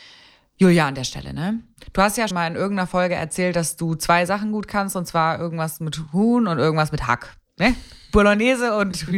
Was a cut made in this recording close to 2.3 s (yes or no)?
yes